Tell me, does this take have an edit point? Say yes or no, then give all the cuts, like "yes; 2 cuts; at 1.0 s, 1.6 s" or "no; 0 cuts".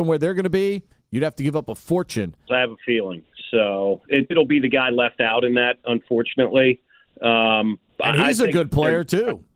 yes; 2 cuts; at 2.5 s, 4.3 s